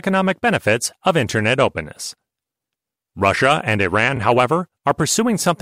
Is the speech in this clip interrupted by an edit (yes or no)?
no